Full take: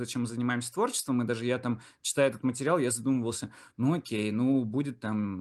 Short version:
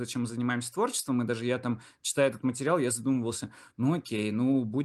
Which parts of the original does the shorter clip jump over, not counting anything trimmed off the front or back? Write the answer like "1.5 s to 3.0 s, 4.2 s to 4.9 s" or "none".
none